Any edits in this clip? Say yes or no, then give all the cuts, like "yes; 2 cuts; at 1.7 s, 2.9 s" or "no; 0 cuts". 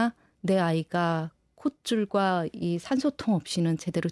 no; 0 cuts